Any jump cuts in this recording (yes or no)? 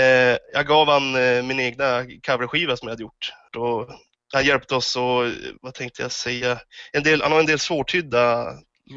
yes